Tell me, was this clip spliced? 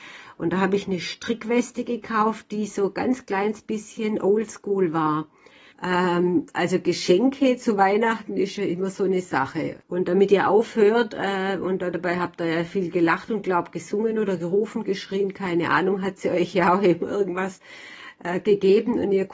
yes; 2 cuts; at 5.7 s, 9.8 s

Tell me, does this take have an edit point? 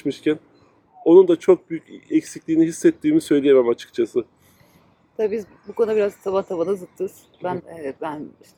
yes; 1 cut; at 7.6 s

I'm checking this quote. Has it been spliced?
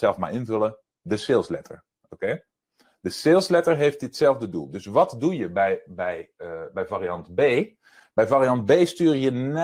no; 0 cuts

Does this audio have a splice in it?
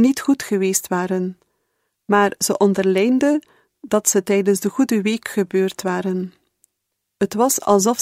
no; 0 cuts

